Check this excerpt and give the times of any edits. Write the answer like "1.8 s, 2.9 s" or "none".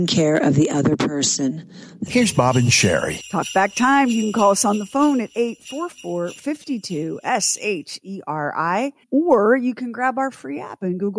2.1 s, 9.0 s